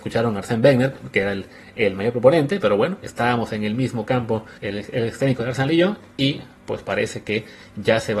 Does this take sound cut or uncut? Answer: cut